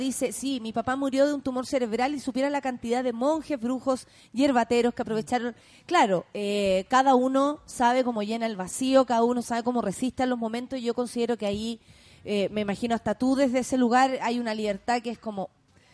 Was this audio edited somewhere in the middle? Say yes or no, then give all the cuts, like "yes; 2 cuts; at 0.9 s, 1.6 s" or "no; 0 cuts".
no; 0 cuts